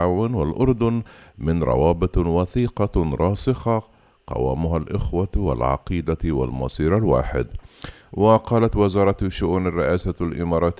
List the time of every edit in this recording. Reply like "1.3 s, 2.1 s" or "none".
8.1 s